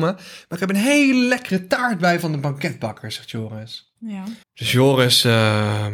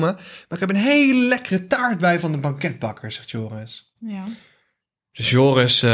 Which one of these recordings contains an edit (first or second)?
first